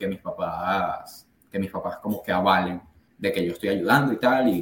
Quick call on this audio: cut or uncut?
uncut